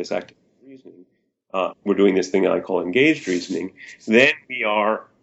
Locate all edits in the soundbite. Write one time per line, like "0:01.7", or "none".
0:01.7